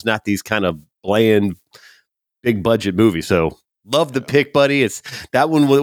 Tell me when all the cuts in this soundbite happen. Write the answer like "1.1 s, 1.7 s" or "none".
none